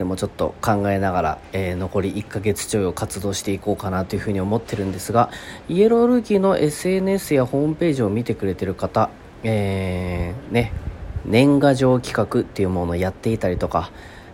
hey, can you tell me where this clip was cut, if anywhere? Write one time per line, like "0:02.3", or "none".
0:11.2